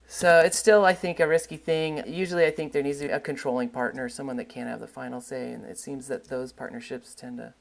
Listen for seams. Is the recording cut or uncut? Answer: cut